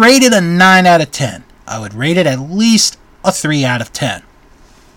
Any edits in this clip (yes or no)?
yes